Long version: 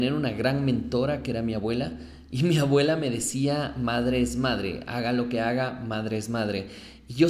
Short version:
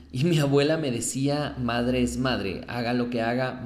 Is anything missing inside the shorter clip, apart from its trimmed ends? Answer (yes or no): no